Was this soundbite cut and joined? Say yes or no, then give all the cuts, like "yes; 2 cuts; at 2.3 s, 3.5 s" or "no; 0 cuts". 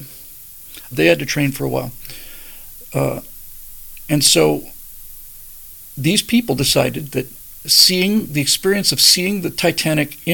yes; 1 cut; at 0.9 s